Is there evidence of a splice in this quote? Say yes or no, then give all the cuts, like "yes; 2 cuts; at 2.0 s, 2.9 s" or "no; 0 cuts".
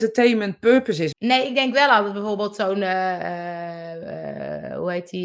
yes; 1 cut; at 1.1 s